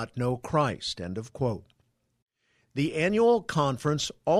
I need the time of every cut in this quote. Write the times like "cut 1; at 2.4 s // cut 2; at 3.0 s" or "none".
none